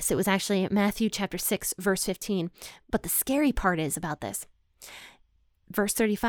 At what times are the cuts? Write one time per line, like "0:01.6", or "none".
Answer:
0:02.9